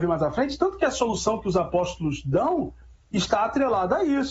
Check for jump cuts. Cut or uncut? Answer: uncut